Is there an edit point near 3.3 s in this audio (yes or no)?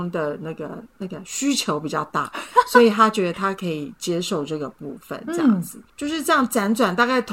yes